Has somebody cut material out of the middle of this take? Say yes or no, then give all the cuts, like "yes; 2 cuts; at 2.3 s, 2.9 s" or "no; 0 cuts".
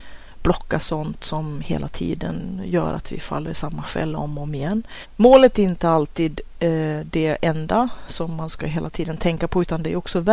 yes; 1 cut; at 5.0 s